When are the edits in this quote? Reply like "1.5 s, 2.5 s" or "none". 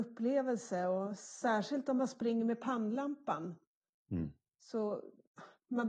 none